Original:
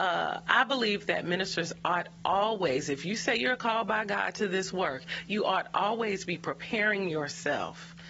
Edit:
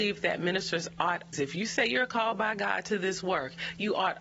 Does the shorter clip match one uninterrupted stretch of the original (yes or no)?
no